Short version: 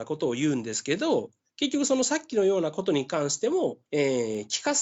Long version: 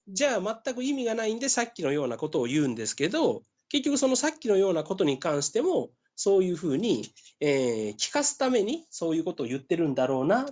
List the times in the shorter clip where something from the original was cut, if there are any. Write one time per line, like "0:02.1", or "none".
0:03.9